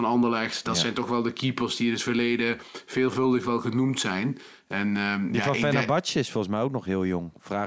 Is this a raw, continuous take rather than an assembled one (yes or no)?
yes